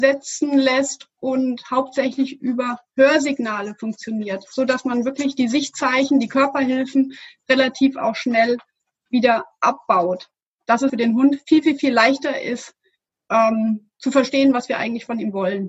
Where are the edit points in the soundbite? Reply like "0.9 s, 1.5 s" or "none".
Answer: 10.9 s